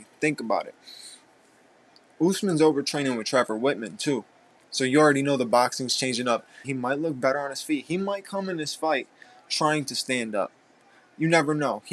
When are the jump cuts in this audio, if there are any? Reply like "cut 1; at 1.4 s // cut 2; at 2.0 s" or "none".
cut 1; at 6.6 s